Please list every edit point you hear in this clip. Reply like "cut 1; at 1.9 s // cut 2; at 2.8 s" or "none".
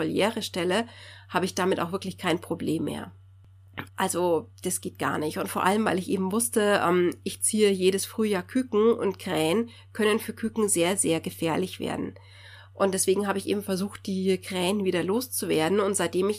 cut 1; at 3.9 s